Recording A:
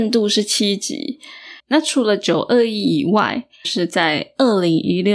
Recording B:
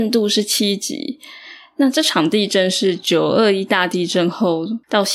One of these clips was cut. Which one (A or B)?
A